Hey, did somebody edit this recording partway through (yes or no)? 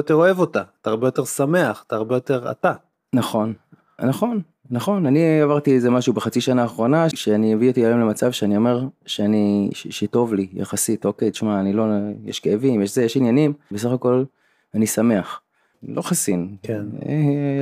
yes